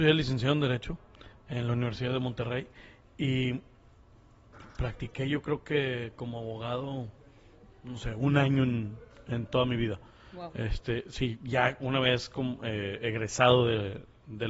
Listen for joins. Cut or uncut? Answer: uncut